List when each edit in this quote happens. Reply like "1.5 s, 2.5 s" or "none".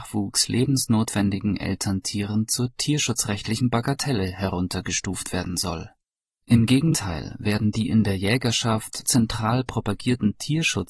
6.4 s, 9.0 s

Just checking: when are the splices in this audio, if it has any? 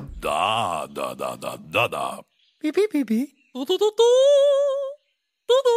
1.6 s

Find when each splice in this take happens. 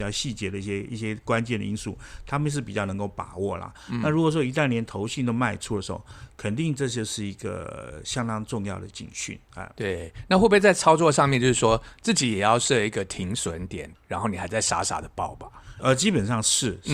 13.9 s, 15.8 s

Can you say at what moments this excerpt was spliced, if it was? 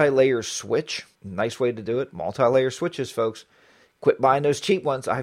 1.1 s

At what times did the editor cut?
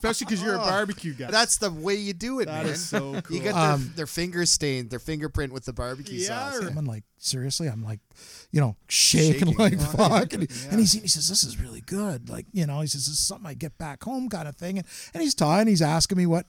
1.3 s, 6.7 s

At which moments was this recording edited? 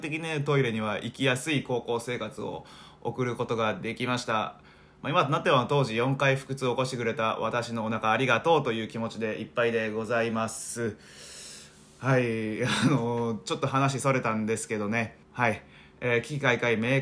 15.2 s

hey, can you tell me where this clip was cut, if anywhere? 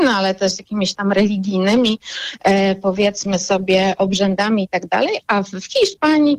none

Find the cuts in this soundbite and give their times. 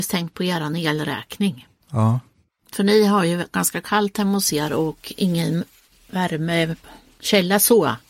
none

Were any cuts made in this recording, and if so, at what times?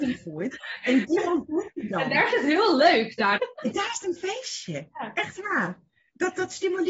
3.4 s

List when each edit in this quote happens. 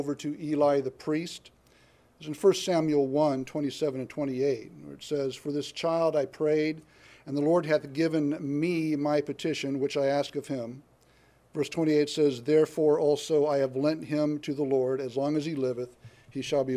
none

